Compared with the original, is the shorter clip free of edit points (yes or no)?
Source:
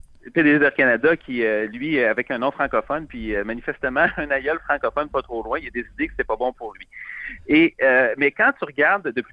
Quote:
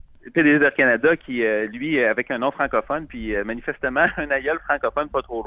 yes